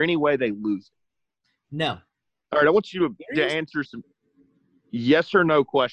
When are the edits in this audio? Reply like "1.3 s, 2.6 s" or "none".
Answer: 2.5 s, 3.9 s